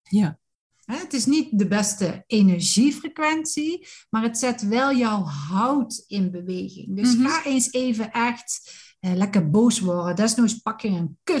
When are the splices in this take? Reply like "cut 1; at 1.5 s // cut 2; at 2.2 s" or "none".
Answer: none